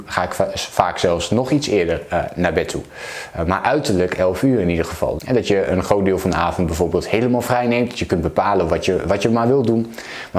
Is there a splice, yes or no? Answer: yes